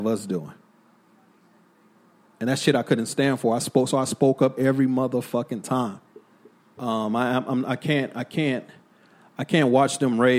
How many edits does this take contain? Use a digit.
1